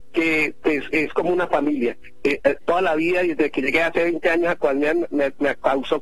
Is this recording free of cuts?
no; 1 cut; at 2.2 s

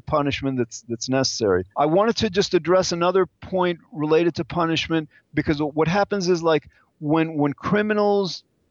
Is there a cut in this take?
yes; 1 cut; at 1.7 s

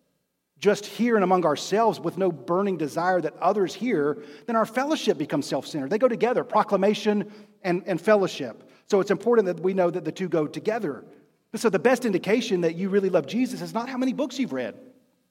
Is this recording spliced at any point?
no; 0 cuts

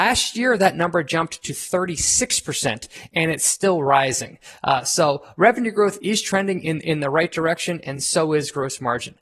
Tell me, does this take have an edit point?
no; 0 cuts

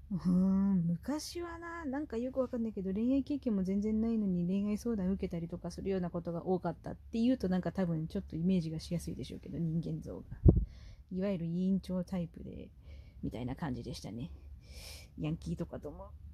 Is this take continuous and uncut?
yes; 0 cuts

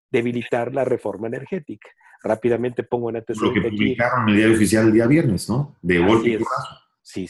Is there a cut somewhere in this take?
no; 0 cuts

